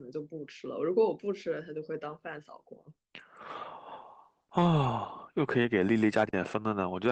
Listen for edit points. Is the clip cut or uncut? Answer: cut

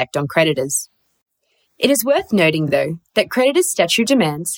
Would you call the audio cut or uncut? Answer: uncut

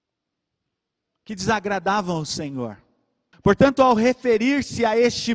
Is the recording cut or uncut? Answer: cut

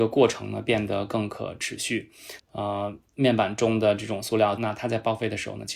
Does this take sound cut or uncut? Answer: cut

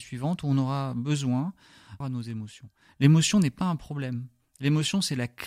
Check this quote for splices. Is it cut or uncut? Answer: cut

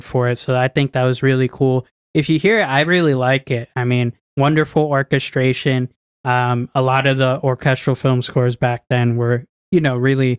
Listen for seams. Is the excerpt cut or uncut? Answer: uncut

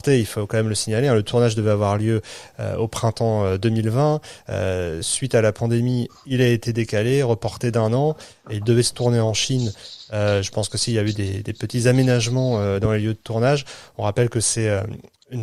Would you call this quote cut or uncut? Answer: uncut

